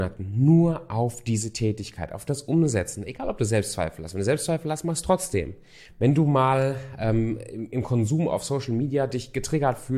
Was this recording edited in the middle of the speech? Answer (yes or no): yes